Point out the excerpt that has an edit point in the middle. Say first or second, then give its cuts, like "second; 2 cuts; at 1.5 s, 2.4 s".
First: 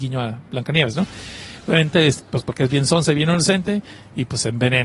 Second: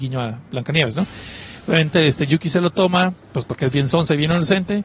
first; 1 cut; at 2.2 s